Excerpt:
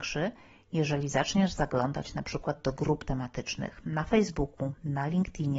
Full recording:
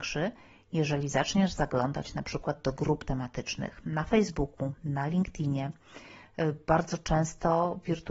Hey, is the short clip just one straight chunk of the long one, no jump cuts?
yes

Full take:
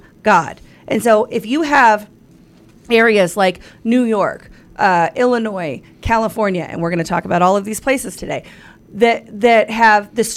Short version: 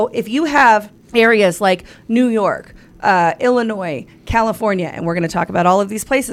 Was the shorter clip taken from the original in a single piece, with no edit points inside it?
no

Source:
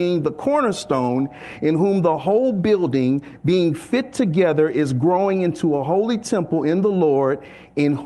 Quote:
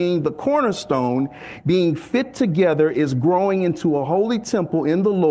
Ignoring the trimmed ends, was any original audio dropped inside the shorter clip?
yes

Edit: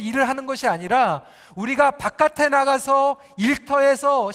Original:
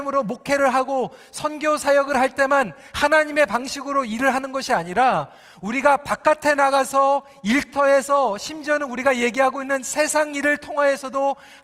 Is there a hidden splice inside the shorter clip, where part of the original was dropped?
no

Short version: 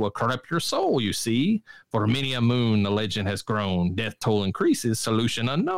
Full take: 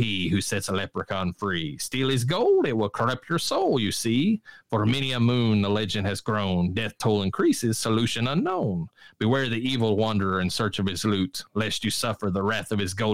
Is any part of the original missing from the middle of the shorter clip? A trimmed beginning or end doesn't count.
no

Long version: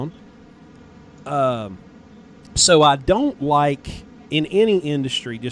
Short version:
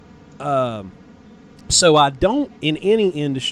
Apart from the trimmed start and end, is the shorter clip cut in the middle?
yes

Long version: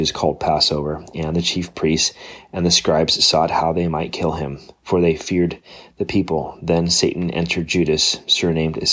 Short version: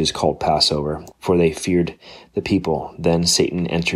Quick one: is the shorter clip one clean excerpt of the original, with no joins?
no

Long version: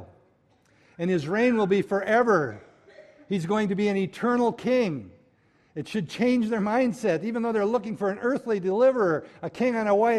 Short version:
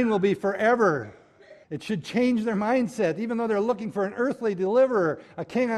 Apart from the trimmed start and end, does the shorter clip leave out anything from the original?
yes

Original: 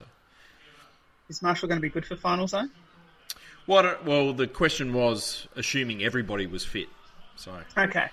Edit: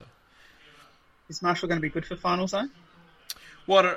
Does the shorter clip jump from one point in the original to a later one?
no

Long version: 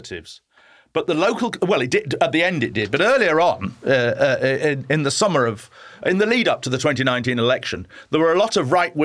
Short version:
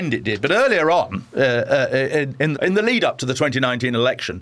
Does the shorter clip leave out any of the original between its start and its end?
yes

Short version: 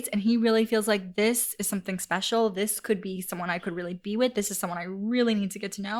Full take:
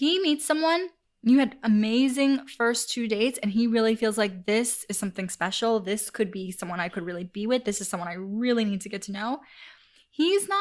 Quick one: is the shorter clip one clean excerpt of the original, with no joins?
yes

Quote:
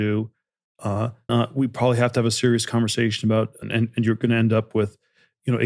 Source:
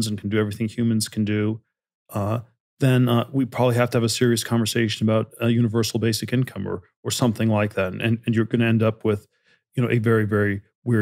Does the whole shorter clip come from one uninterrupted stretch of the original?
no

